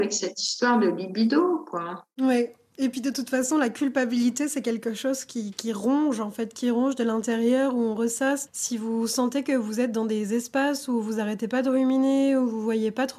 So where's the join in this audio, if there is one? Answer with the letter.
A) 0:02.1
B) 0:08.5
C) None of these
B